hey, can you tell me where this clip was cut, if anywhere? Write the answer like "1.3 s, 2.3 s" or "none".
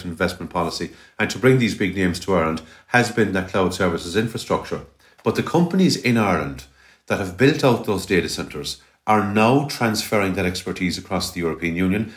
none